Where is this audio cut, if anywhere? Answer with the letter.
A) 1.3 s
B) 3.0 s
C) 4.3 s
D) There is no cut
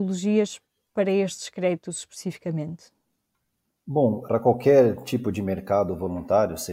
C